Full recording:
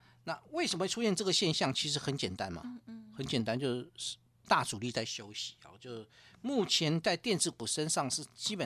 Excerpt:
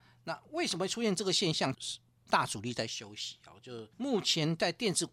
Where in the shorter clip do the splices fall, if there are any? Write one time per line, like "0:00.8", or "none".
0:01.7
0:03.9